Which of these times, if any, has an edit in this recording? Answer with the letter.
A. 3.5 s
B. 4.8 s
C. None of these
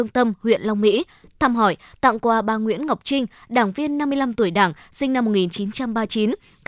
C